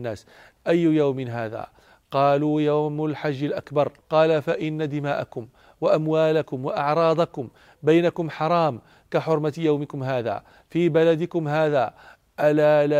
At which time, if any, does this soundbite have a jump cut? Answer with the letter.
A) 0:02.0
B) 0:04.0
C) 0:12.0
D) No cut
B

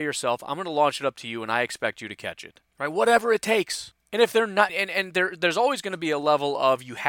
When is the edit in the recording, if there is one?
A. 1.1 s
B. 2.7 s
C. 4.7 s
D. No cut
C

